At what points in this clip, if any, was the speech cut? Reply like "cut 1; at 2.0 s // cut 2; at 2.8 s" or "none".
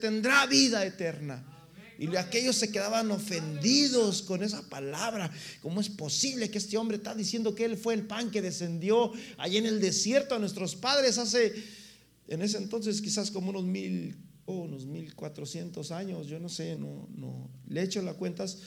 cut 1; at 14.5 s // cut 2; at 16.8 s